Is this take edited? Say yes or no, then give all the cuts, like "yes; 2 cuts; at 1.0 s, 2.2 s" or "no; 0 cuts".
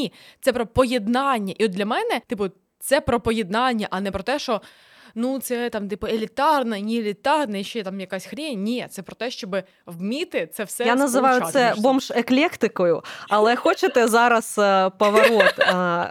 no; 0 cuts